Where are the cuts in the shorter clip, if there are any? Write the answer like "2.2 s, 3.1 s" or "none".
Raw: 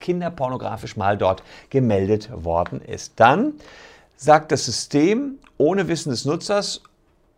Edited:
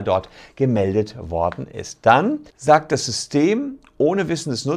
2.5 s

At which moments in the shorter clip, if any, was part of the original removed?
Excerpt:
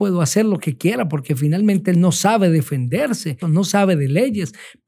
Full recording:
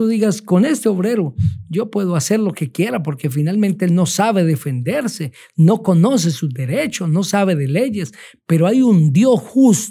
3.4 s

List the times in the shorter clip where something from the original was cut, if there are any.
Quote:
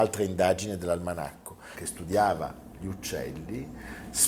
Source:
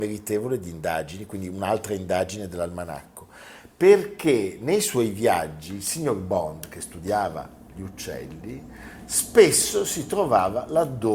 1.7 s

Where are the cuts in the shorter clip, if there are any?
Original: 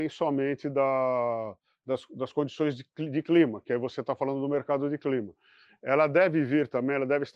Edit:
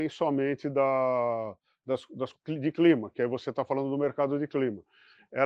2.3 s

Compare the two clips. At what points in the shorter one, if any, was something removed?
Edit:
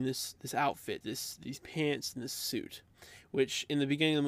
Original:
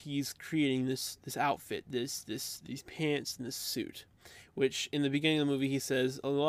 1.0 s

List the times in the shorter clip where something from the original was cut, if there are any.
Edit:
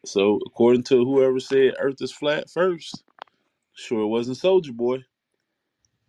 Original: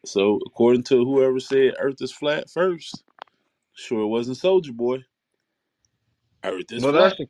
none

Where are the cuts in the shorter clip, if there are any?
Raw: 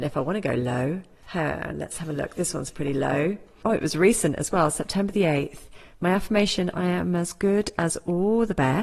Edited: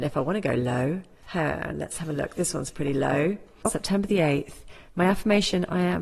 3.7 s

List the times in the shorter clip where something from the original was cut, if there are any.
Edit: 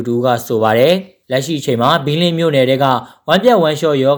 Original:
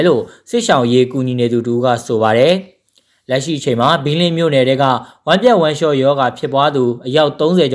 1.2 s

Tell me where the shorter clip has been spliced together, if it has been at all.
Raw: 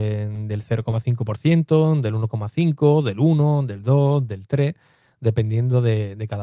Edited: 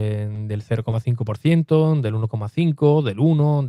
none

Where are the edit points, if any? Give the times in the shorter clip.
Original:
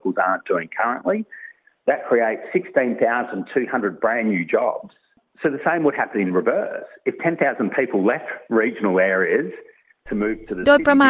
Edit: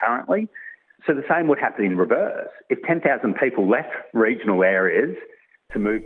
1.0 s

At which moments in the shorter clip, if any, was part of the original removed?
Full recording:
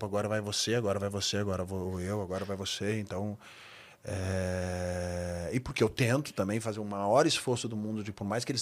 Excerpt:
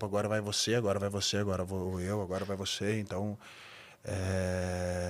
none

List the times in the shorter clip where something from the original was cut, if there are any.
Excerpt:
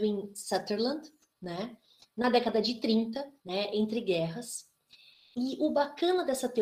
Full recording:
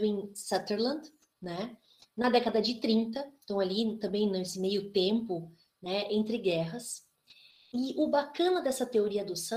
3.4 s

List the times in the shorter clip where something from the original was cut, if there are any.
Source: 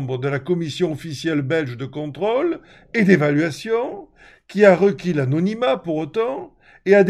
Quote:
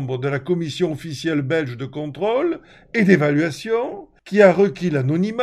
4.2 s

